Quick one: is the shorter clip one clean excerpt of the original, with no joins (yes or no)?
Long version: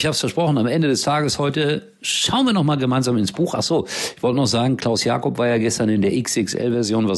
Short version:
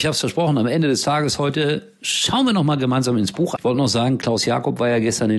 no